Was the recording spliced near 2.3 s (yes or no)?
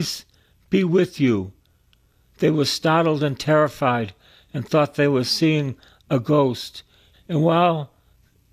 no